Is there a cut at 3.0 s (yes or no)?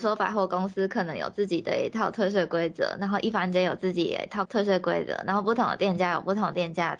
no